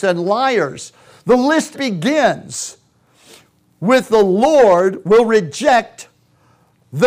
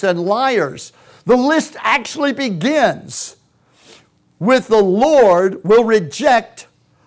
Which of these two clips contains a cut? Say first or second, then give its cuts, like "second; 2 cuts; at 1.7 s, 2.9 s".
first; 1 cut; at 1.7 s